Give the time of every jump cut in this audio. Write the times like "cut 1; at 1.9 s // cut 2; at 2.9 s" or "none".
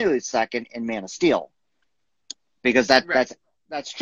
none